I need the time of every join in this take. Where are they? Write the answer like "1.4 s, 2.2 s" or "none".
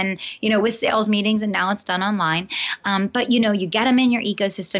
none